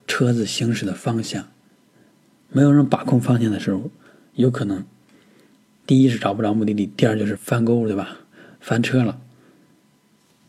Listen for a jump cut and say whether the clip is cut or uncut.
cut